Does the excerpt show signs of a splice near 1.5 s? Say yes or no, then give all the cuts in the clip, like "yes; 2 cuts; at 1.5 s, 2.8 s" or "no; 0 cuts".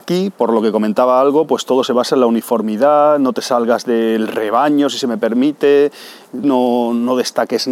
no; 1 cut; at 6.4 s